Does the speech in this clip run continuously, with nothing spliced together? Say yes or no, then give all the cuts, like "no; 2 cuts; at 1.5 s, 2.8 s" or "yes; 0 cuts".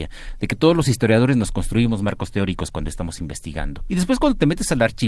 no; 1 cut; at 3.9 s